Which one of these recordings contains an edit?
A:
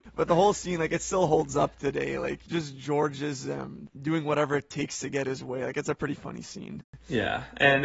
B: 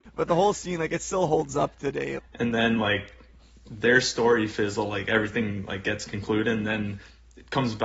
B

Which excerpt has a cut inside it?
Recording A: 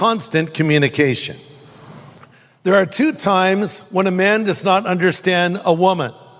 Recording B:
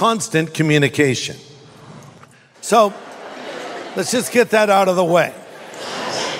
B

